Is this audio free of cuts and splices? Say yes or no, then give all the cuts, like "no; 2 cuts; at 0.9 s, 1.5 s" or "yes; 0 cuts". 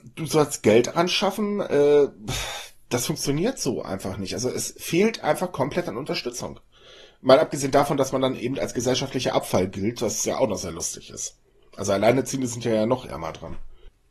yes; 0 cuts